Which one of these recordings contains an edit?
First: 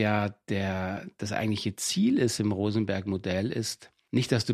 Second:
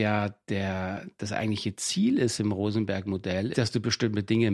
second; 1 cut; at 3.5 s

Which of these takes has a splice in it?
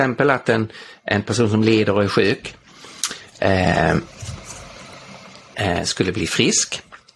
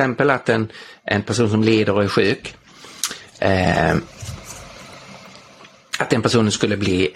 first; 1 cut; at 5.5 s

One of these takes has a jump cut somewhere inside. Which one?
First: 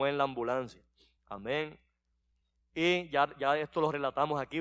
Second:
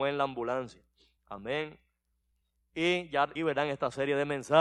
second; 1 cut; at 3.4 s

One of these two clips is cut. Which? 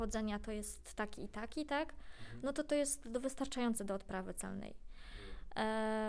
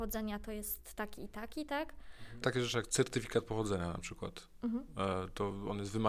second; 1 cut; at 2.4 s

